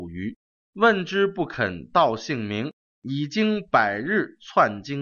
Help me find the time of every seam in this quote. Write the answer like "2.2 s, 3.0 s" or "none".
2.8 s